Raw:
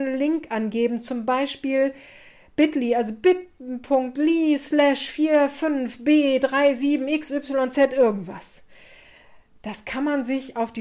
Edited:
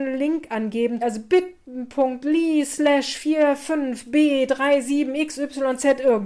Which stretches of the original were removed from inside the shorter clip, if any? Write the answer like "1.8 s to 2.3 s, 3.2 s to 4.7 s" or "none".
1.0 s to 2.9 s